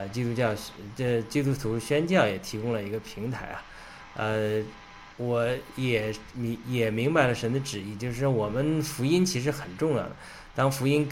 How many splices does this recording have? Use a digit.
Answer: 0